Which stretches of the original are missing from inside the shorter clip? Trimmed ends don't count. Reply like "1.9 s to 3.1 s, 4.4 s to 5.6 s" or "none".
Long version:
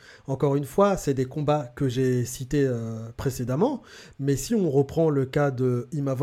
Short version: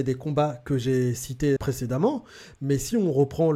2.7 s to 3.1 s